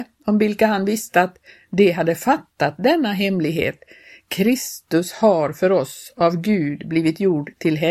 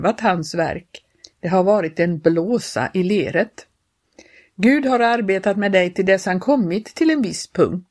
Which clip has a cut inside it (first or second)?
second